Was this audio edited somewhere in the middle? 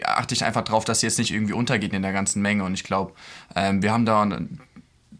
no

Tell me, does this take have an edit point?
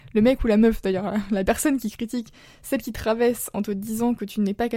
no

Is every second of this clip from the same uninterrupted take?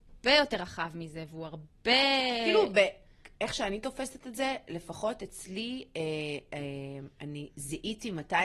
yes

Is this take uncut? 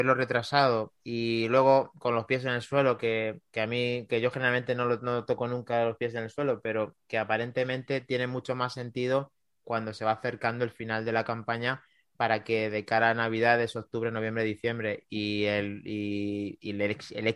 yes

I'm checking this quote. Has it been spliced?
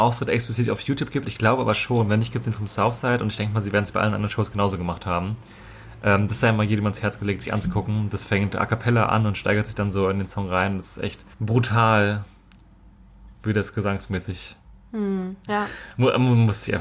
yes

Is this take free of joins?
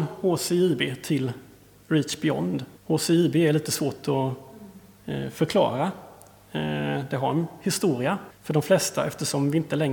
no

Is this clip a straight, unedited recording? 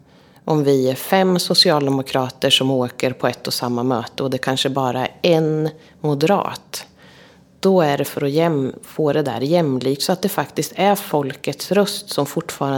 yes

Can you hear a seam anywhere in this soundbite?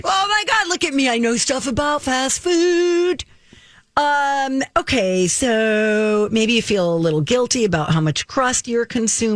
no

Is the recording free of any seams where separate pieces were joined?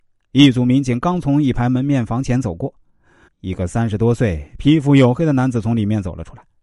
no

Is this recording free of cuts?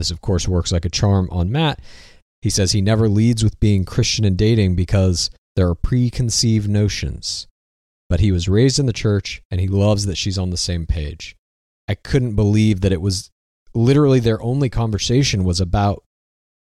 yes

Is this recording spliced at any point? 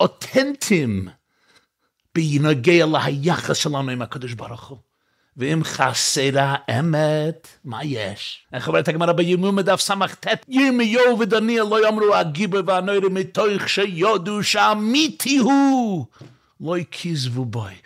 yes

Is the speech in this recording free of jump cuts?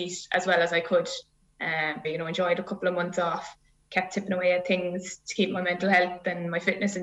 no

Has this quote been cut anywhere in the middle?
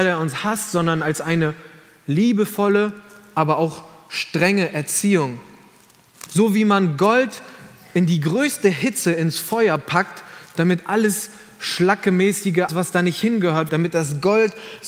yes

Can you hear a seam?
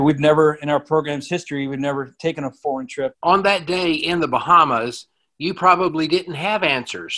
yes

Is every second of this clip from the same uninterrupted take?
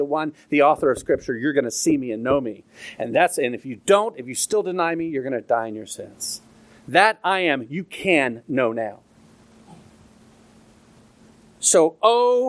yes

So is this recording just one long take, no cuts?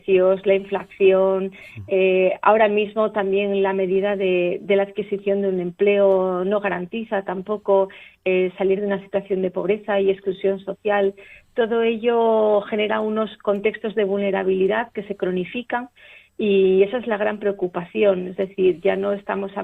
yes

